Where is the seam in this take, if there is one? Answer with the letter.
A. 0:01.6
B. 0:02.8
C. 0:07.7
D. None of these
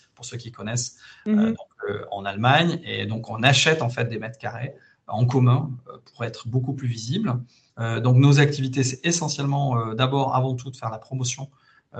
C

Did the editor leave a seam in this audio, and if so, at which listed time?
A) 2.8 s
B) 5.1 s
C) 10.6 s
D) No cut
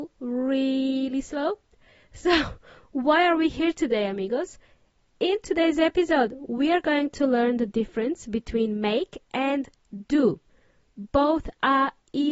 D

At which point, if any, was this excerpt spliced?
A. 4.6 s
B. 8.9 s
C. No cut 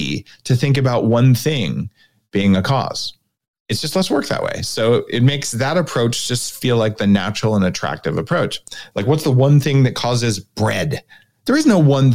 B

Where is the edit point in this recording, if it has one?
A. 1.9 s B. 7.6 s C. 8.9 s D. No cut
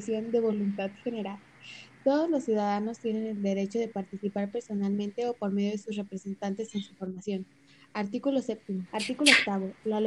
C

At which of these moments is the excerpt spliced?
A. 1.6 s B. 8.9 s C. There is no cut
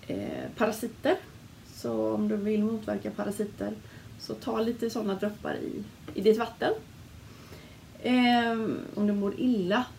B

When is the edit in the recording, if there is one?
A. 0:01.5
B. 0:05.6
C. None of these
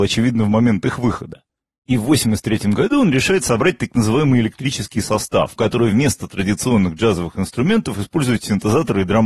B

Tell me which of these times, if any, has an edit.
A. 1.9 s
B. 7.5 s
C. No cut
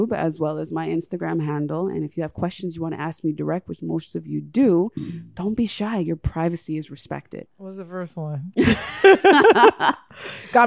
B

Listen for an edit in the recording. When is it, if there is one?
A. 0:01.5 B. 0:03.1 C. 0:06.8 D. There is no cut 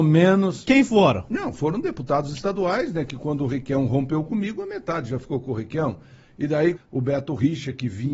C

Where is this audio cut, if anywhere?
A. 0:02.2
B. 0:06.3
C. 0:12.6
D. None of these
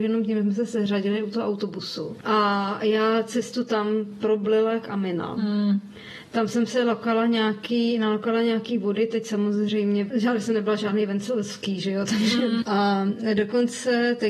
C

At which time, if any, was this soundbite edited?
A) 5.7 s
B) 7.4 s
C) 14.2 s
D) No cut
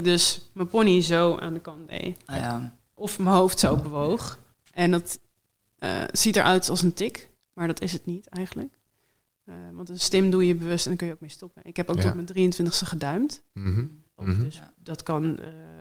C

